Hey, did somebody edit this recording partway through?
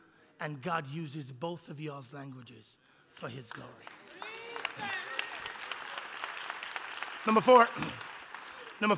no; 0 cuts

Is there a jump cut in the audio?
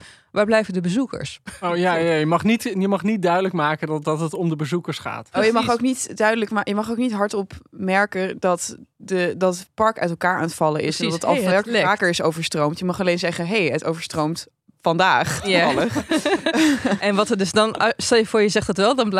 no; 0 cuts

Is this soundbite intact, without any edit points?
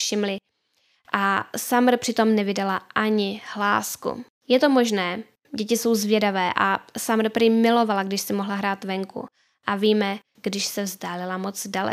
no; 2 cuts; at 5.4 s, 10.4 s

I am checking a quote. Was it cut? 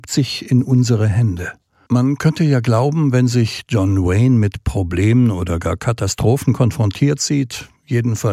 yes; 1 cut; at 1.9 s

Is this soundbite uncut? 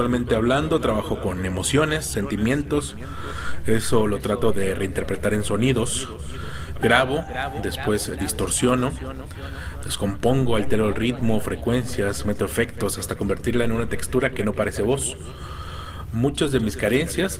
no; 1 cut; at 6.7 s

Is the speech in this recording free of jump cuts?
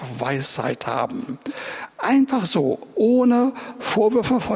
yes; 0 cuts

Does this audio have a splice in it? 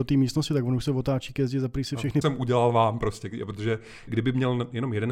yes; 2 cuts; at 2.2 s, 4.1 s

